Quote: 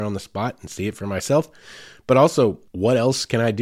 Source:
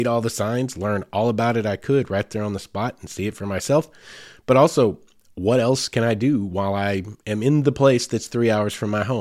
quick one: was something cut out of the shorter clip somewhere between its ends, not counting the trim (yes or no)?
yes